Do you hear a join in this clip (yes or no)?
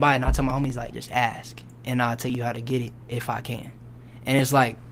yes